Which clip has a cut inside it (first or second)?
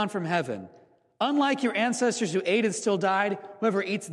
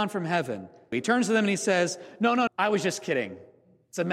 second